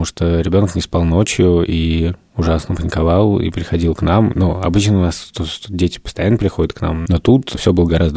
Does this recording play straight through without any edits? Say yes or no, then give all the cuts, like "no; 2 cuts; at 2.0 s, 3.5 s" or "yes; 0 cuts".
yes; 0 cuts